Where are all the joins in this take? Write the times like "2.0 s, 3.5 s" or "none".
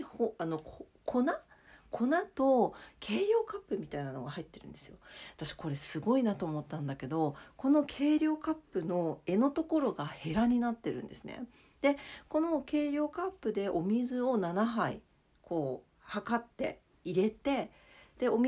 none

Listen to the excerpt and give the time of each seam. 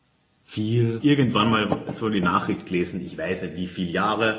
1.0 s

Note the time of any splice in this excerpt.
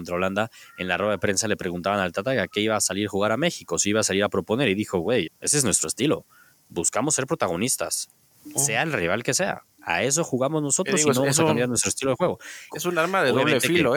5.3 s, 12.7 s

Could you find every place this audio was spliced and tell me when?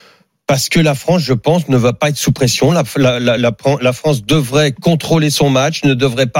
none

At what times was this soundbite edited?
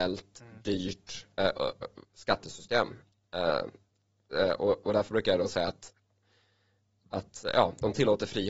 none

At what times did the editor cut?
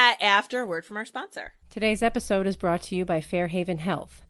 1.6 s

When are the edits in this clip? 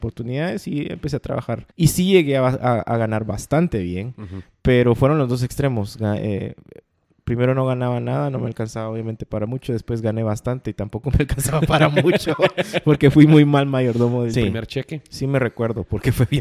1.7 s, 14.3 s

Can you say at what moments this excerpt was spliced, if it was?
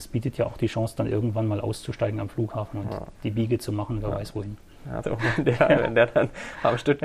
5.0 s

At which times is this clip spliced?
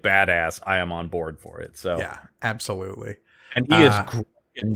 none

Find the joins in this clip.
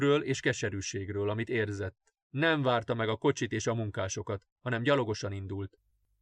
2.1 s

